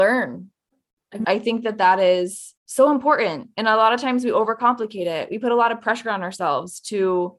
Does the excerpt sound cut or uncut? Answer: cut